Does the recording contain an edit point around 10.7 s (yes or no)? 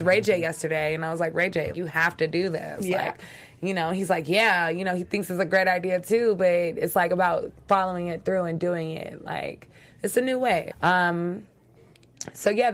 yes